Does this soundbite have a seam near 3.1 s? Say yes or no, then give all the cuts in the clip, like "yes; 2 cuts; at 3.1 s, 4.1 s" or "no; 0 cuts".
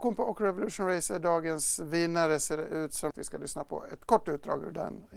yes; 1 cut; at 3.1 s